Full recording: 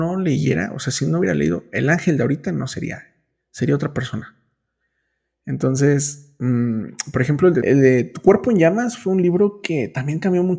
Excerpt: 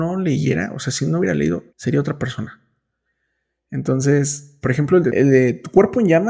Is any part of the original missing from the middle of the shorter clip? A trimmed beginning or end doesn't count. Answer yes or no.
yes